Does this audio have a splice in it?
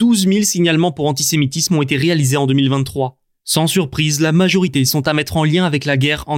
no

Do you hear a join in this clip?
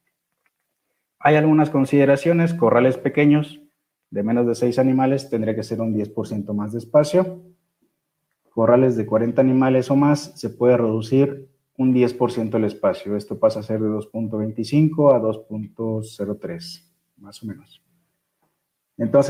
no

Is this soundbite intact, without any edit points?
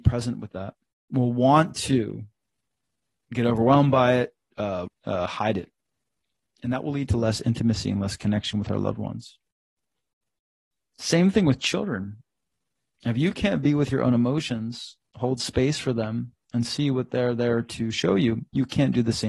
no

